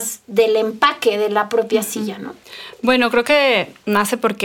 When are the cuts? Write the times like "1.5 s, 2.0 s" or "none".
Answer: none